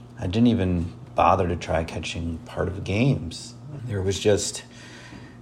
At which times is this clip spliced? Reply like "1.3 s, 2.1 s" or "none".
3.8 s